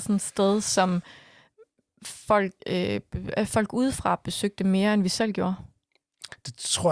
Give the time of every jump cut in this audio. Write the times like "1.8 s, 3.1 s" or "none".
2.6 s